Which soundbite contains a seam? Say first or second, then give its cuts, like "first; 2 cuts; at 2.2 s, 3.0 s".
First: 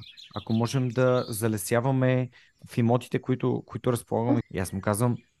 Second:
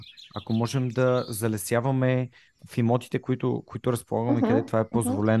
first; 1 cut; at 4.4 s